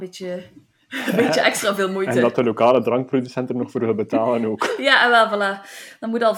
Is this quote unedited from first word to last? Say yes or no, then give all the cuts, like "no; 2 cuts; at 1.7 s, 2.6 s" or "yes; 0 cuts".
yes; 0 cuts